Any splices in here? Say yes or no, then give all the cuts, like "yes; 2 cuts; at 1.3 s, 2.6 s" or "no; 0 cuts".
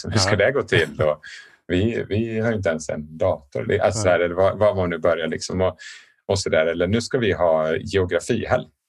no; 0 cuts